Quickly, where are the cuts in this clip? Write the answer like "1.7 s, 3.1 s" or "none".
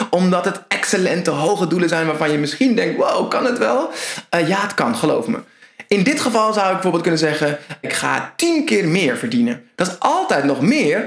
7.8 s, 9.7 s